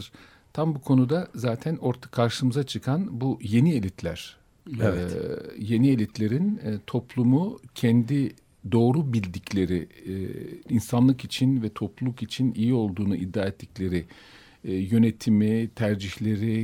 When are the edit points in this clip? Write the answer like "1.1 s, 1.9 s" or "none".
10.6 s